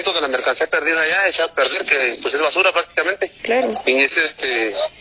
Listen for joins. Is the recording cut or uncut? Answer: cut